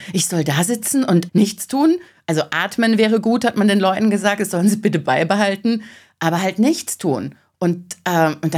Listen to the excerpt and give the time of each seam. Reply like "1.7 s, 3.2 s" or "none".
1.3 s